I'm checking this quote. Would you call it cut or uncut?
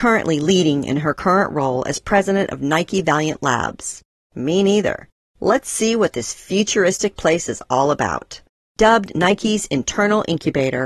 cut